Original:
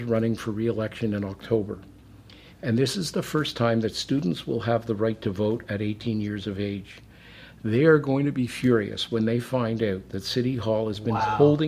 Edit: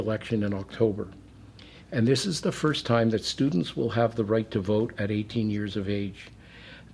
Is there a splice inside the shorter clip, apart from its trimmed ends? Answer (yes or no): no